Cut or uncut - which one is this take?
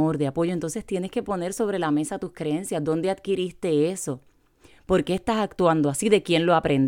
uncut